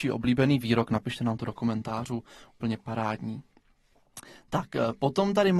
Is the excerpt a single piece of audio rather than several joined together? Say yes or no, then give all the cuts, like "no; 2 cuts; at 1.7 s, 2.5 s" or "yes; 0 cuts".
yes; 0 cuts